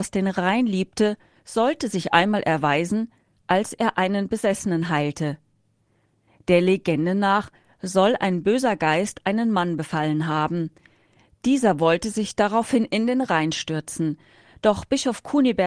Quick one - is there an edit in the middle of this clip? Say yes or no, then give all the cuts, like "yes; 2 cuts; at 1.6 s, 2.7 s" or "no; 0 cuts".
no; 0 cuts